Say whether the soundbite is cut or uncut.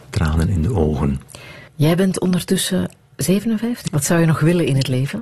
cut